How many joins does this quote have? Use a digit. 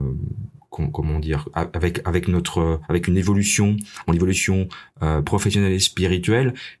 1